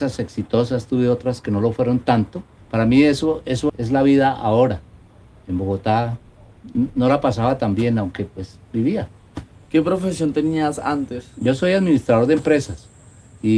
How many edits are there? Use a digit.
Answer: 2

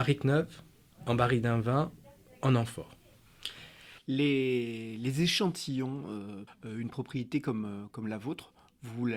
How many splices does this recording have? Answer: 1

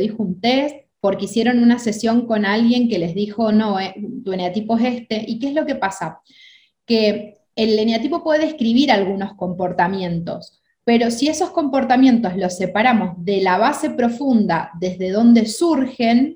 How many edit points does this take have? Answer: 1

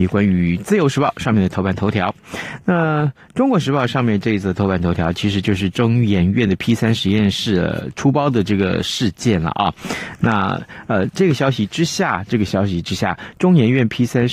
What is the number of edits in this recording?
0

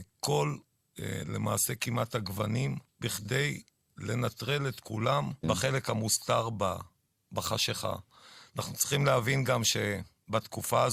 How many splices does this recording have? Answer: 2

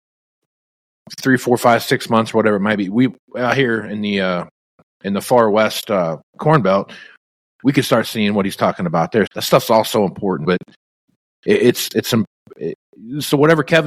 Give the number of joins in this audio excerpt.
2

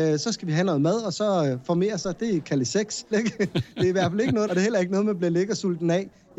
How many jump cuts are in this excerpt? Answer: 2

